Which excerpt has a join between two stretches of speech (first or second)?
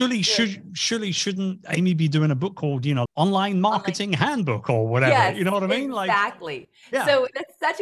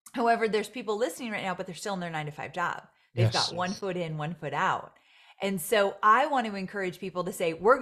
first